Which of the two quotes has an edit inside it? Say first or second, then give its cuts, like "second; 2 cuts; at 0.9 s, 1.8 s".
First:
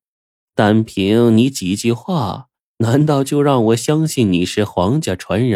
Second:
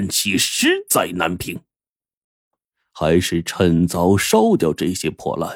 second; 1 cut; at 2.5 s